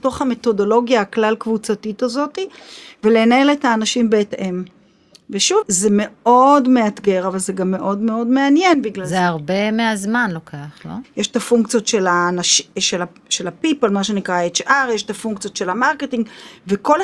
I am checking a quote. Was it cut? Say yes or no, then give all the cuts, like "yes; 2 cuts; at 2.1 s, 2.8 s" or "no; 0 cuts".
yes; 2 cuts; at 5.6 s, 11.0 s